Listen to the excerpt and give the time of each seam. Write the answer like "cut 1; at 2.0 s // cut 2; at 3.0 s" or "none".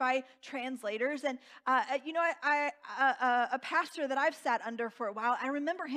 none